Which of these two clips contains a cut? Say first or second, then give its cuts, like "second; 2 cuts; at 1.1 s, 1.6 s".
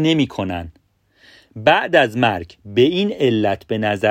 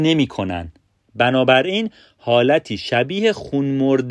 second; 1 cut; at 1.0 s